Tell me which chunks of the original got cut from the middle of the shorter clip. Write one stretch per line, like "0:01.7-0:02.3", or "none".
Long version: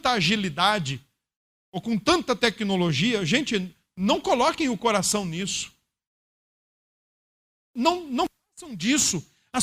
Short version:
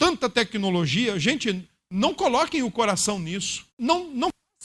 0:05.7-0:07.7